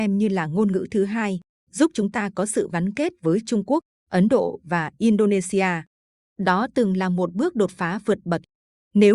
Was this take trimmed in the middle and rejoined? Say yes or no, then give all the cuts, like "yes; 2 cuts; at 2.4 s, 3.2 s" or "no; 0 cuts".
no; 0 cuts